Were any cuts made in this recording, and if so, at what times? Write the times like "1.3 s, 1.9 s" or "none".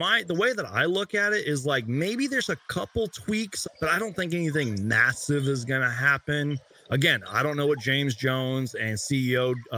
3.6 s